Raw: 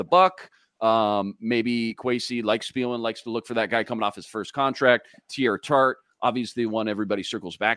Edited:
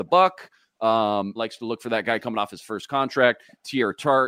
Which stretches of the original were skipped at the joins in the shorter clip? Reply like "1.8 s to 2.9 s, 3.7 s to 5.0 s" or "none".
1.4 s to 3.0 s